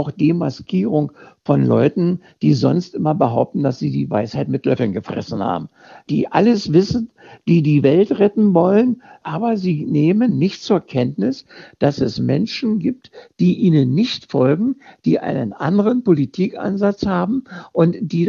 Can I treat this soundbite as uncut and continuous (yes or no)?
yes